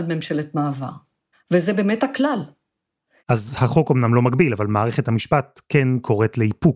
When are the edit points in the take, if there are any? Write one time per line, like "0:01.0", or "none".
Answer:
0:01.3
0:03.2